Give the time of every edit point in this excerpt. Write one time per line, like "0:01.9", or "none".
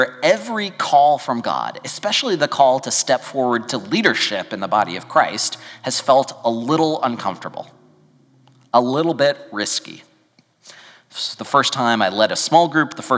none